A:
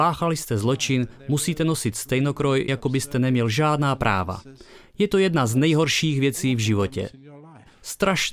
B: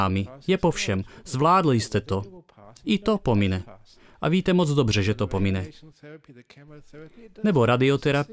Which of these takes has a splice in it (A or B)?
A